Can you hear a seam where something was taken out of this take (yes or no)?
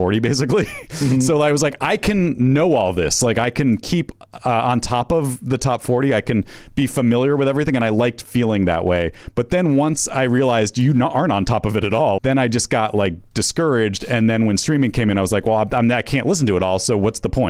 yes